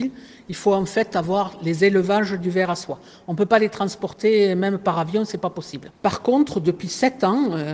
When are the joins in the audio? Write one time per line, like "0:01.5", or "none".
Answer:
none